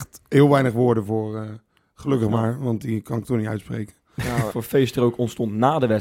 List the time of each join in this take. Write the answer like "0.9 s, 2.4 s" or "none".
4.5 s